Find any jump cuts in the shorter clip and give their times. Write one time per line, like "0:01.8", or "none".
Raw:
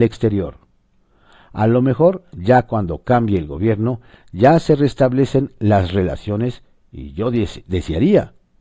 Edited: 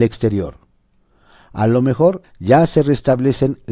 0:02.2